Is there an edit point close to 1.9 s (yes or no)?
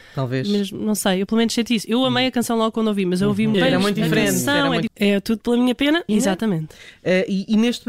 no